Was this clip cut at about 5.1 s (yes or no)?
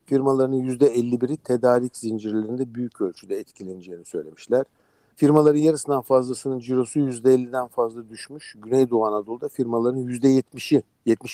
yes